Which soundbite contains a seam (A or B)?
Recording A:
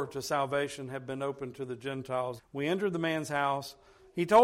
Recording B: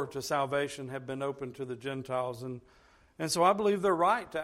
A